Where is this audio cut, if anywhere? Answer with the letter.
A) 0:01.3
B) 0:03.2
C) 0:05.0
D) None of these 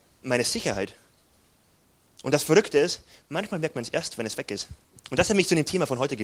C